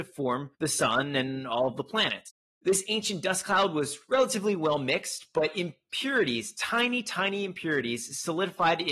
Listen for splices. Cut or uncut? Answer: uncut